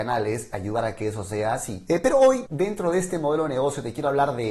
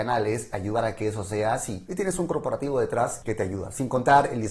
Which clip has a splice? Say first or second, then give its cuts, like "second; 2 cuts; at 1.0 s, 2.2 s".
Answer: second; 1 cut; at 1.9 s